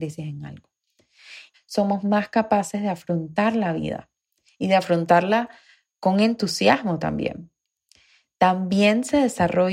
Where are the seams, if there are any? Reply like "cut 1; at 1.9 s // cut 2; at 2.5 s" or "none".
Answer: cut 1; at 1.5 s